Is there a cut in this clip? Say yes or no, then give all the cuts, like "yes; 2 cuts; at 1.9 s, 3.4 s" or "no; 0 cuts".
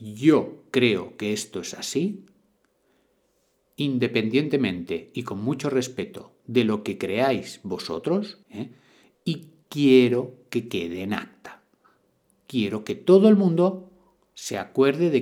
yes; 1 cut; at 8.4 s